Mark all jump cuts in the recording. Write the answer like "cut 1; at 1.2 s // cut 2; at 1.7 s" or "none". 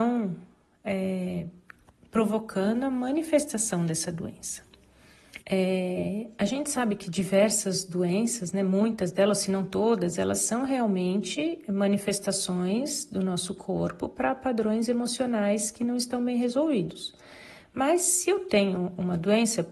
cut 1; at 5.4 s